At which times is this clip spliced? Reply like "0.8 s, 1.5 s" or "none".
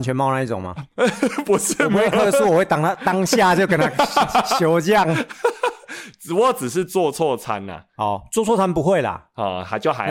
none